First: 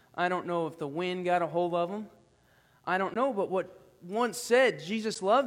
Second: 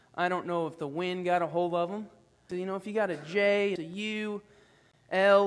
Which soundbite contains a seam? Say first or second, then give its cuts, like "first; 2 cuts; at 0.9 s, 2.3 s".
second; 2 cuts; at 2.5 s, 3.8 s